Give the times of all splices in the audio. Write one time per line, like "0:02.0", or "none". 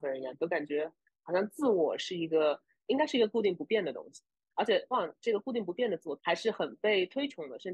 0:04.9
0:06.2